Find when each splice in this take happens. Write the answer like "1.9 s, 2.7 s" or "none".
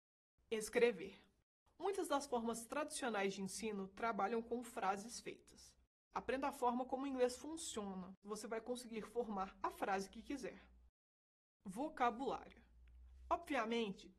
6.1 s, 8.2 s